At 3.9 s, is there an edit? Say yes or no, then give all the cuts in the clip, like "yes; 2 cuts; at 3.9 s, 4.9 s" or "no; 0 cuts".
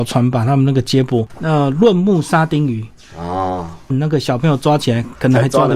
yes; 2 cuts; at 1.3 s, 3.9 s